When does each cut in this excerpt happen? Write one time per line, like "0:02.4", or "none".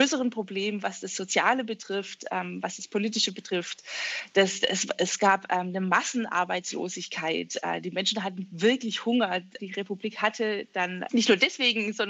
0:09.6
0:11.1

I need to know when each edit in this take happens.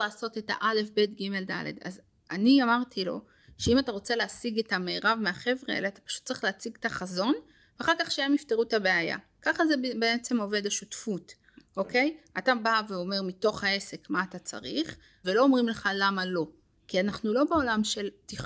0:15.2

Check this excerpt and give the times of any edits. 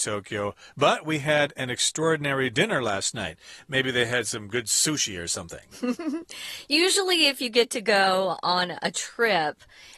none

